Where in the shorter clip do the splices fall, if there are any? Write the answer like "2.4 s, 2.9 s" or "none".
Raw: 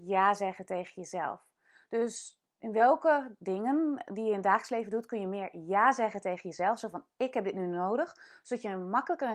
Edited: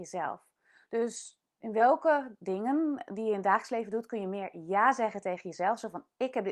none